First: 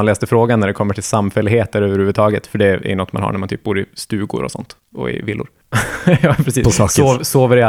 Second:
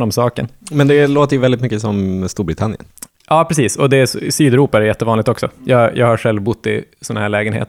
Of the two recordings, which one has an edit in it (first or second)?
first